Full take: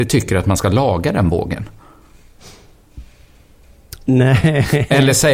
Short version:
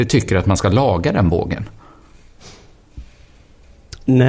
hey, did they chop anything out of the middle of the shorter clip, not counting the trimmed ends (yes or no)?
no